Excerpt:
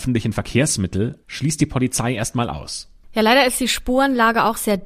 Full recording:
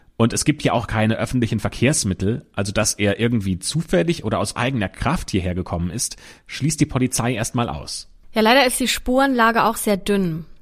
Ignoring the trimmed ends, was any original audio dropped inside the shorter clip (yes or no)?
yes